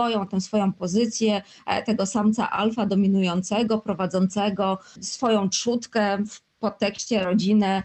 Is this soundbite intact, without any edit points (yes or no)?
no